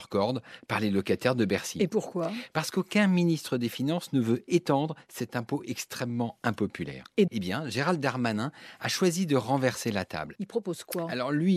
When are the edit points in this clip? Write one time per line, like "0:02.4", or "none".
0:07.3
0:10.3